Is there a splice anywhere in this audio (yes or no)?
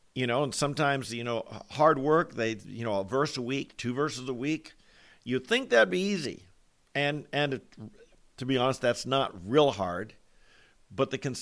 no